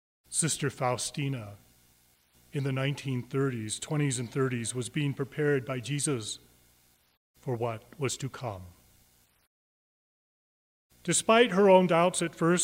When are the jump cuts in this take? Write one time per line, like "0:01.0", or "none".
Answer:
none